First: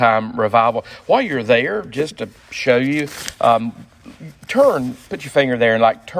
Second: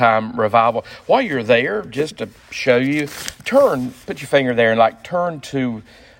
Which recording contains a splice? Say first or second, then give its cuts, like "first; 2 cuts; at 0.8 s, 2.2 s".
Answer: second; 1 cut; at 3.4 s